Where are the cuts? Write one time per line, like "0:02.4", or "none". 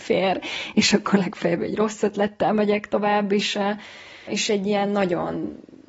0:04.3